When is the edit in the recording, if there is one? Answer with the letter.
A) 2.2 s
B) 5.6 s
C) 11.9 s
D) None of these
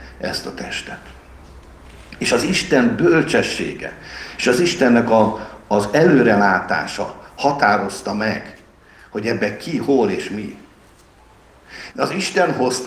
C